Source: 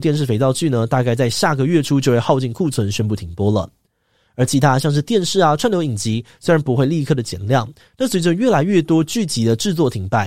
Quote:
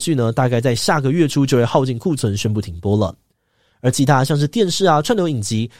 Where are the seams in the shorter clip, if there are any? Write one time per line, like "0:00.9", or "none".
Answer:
none

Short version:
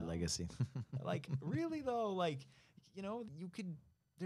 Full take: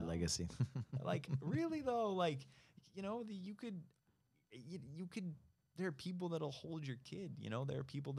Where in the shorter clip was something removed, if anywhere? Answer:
0:03.3

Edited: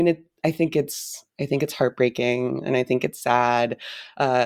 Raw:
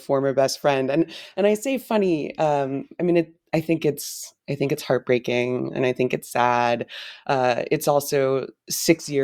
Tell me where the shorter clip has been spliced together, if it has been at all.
none

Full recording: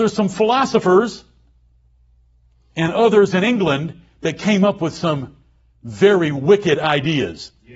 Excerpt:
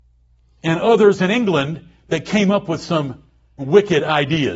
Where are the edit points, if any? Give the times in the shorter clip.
0:03.6

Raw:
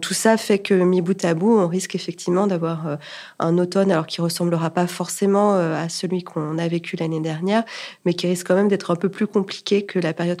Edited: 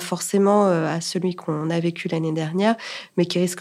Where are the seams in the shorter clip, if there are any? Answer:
none

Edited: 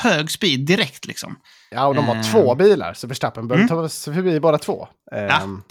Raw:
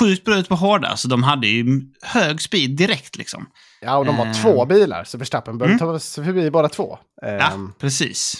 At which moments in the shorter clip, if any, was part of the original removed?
none

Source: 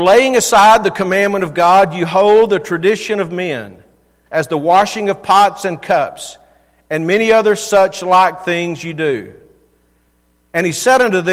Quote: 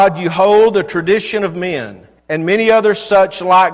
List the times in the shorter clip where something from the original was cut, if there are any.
0:02.2

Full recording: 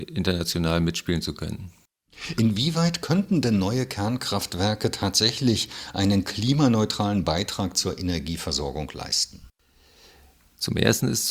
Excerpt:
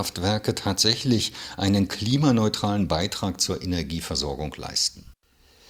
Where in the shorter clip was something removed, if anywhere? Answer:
none

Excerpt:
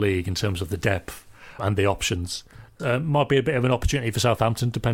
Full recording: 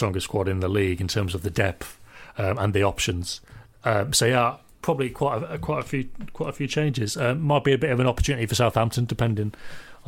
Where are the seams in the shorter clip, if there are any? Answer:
0:01.6
0:02.8

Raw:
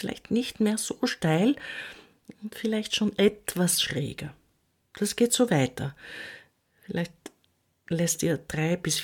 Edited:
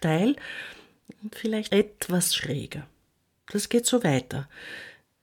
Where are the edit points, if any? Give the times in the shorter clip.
0:01.7

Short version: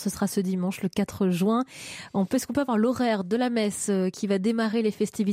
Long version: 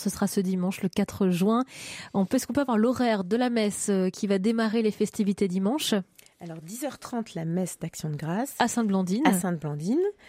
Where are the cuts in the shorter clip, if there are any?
none

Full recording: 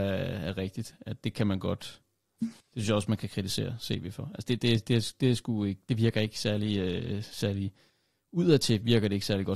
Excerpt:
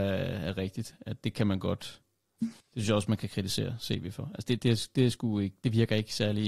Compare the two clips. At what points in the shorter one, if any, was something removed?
0:04.6

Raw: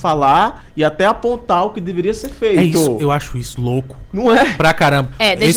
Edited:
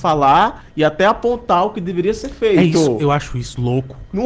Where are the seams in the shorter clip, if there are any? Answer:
none

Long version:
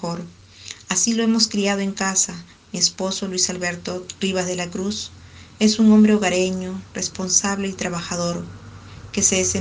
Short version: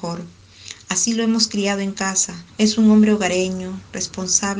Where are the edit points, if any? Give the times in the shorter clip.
0:02.5

